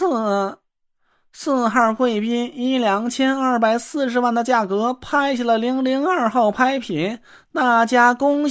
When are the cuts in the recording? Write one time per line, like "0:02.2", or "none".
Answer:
none